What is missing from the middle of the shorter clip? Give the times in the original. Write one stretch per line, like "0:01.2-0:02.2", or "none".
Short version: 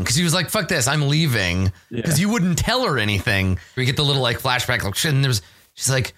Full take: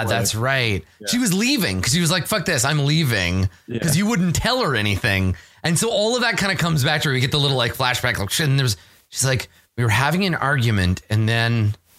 0:05.5-0:07.1